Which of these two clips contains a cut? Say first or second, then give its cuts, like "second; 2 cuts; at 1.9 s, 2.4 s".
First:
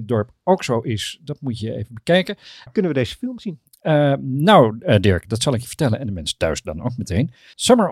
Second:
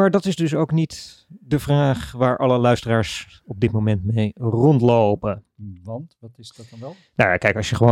first; 1 cut; at 2.7 s